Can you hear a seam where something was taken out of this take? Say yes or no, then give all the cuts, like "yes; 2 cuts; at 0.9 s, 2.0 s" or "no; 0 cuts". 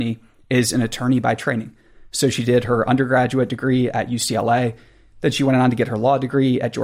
no; 0 cuts